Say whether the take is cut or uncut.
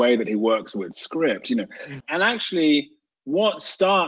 cut